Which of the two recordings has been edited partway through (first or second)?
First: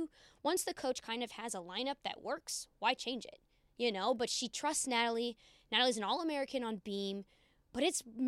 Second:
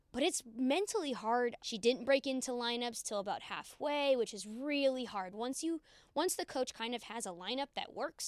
second